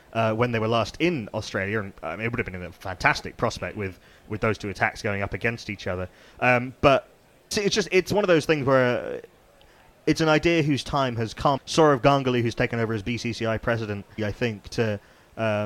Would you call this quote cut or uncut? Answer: cut